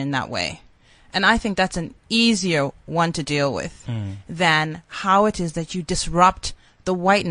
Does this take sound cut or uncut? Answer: cut